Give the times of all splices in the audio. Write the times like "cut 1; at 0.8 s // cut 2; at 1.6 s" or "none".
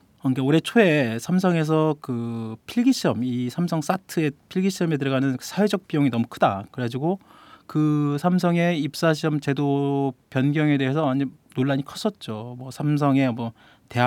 cut 1; at 6.7 s